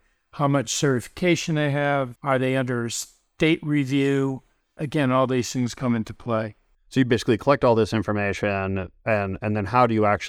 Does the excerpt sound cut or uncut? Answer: cut